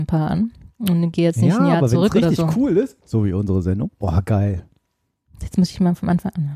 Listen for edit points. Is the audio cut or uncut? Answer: cut